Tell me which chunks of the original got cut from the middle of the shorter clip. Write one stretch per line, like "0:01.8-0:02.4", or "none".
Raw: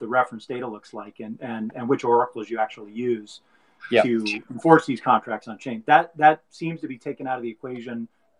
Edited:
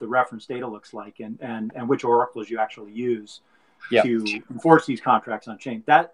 none